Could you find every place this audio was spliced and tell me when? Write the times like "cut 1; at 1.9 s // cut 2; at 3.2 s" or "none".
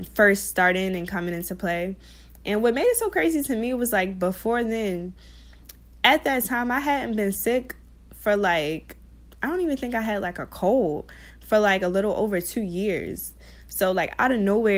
none